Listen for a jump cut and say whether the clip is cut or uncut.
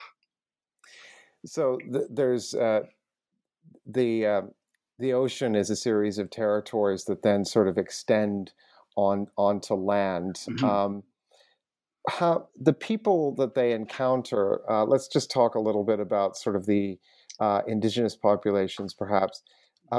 uncut